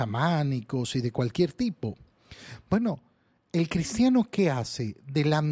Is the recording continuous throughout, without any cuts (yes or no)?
yes